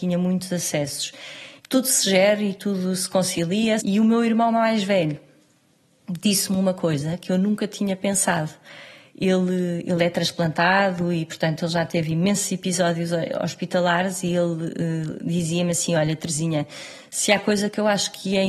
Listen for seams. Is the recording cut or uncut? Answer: cut